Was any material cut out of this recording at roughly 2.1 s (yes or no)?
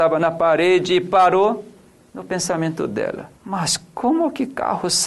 yes